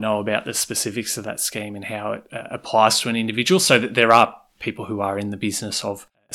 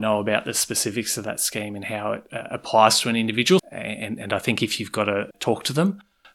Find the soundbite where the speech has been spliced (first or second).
second